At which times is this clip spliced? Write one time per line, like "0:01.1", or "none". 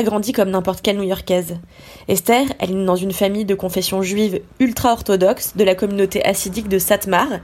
none